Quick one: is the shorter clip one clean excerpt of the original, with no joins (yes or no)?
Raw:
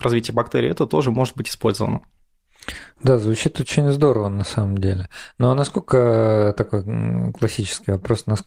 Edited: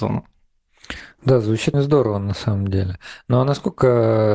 no